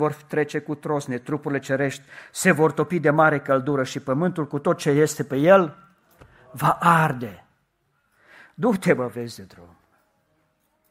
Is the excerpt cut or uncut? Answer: uncut